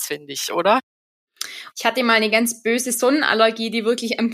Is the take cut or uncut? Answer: cut